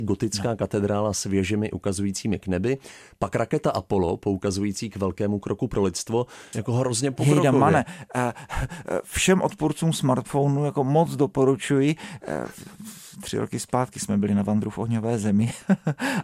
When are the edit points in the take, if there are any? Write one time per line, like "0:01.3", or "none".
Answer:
0:06.5